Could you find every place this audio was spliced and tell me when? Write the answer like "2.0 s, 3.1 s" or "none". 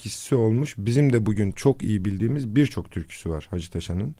none